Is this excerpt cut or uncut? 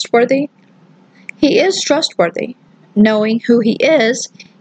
uncut